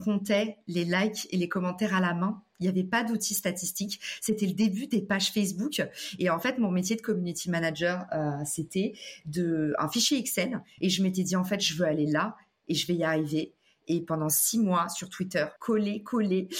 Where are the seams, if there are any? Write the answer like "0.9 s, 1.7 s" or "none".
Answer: 10.8 s, 15.6 s